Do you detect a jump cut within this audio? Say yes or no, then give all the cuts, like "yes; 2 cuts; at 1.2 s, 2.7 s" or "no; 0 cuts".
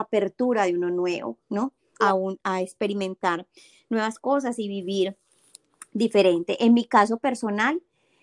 yes; 1 cut; at 2.0 s